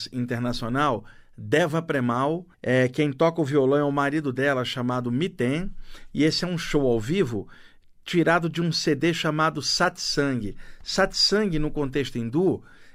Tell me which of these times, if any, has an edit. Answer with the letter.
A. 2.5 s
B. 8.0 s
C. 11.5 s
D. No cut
A